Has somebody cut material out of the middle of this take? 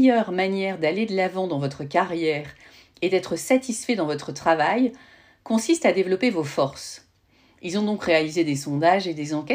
no; 0 cuts

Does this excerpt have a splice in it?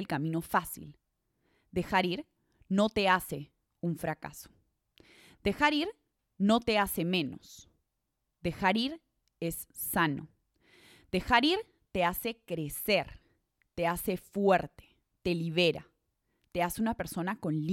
no; 0 cuts

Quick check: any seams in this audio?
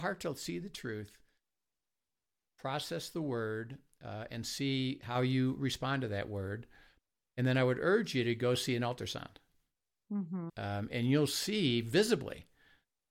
yes; 1 cut; at 10.5 s

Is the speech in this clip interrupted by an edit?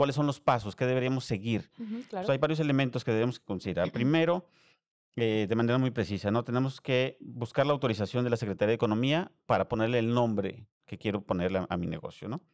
no; 0 cuts

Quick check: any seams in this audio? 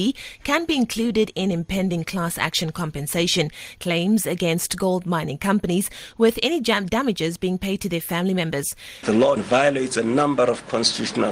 yes; 1 cut; at 9.0 s

